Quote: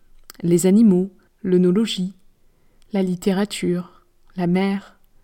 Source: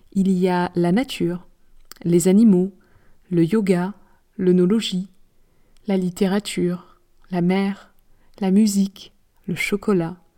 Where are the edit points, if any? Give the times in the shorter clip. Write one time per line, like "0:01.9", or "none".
0:01.3